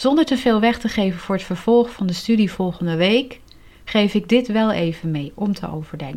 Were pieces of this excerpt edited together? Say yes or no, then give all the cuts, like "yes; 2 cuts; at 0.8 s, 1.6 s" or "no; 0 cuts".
no; 0 cuts